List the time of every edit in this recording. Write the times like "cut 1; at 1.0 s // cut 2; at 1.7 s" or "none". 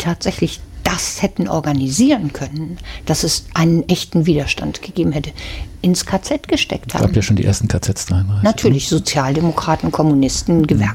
none